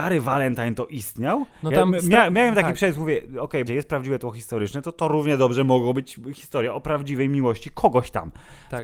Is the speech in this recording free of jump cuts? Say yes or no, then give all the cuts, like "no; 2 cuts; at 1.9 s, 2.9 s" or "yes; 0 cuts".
no; 1 cut; at 3.7 s